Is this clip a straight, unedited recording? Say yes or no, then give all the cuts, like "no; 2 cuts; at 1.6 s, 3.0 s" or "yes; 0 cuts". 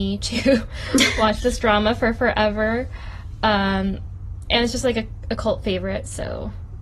yes; 0 cuts